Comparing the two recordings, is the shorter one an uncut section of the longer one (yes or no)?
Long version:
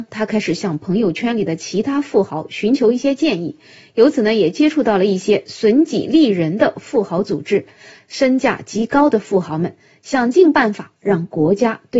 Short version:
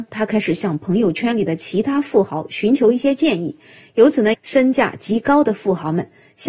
no